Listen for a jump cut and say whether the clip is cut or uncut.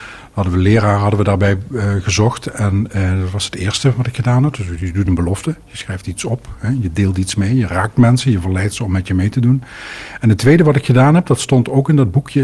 uncut